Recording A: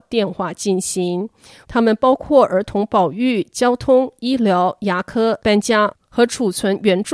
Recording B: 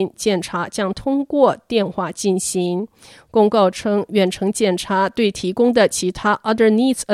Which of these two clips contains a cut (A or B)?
A